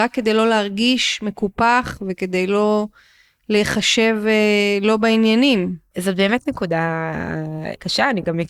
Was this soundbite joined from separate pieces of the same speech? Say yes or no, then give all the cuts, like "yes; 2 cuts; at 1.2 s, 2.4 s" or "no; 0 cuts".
no; 0 cuts